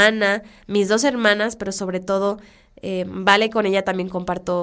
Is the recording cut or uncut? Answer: uncut